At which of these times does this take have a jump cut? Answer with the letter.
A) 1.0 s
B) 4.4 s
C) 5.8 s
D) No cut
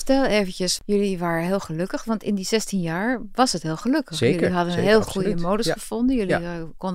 D